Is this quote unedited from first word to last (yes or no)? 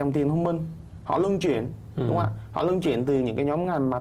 yes